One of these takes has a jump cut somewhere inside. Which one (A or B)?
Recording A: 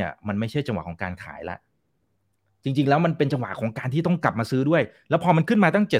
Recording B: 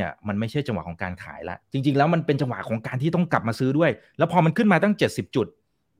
B